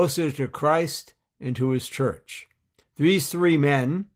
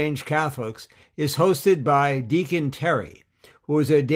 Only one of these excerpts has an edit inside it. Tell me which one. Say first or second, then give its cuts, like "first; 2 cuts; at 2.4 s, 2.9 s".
first; 1 cut; at 2.8 s